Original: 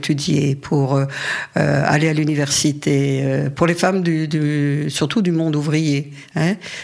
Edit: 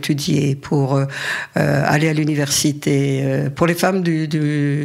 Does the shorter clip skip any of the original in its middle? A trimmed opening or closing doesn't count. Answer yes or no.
no